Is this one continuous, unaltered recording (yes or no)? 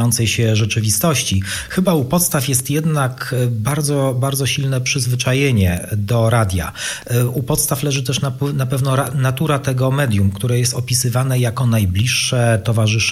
yes